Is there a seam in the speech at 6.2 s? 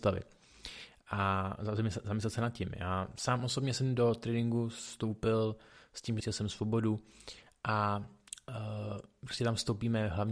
yes; 1 cut; at 6.2 s

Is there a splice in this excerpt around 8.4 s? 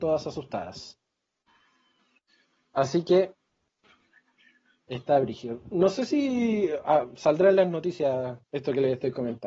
yes; 1 cut; at 8.4 s

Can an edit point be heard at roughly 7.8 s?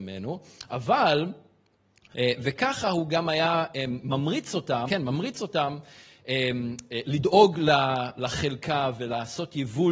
no; 2 cuts; at 2.1 s, 4.9 s

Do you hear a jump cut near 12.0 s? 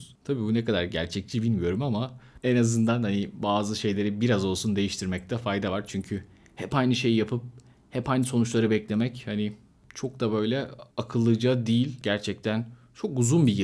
yes; 2 cuts; at 10.9 s, 12.0 s

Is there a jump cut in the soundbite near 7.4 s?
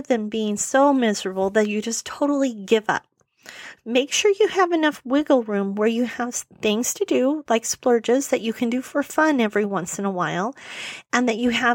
no; 1 cut; at 3.8 s

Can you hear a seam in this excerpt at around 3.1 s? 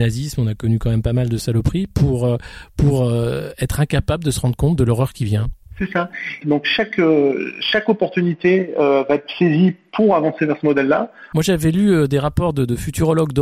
no; 2 cuts; at 6.4 s, 11.3 s

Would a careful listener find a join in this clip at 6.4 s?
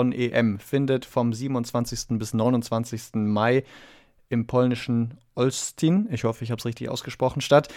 no; 0 cuts

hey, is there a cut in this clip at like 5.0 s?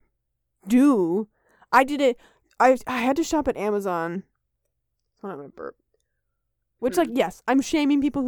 no; 1 cut; at 6.8 s

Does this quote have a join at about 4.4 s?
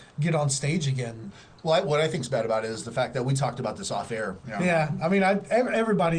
yes; 1 cut; at 4.4 s

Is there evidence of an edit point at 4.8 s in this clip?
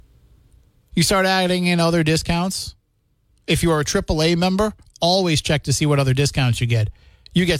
no; 0 cuts

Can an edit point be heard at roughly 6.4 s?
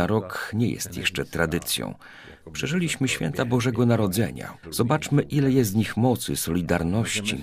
no; 1 cut; at 4.6 s

